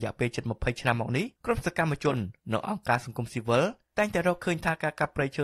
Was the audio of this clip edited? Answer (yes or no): no